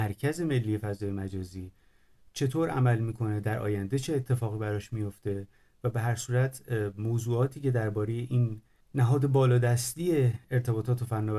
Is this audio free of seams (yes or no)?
no